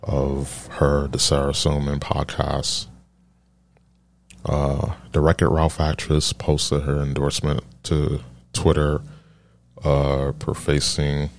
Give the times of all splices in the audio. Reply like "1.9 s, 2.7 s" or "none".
none